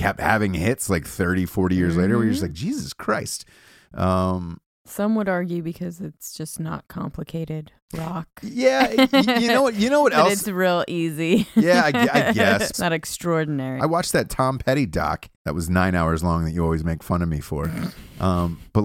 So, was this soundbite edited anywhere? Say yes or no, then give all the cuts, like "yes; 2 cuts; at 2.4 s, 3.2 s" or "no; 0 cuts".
yes; 3 cuts; at 12.7 s, 13.8 s, 15.3 s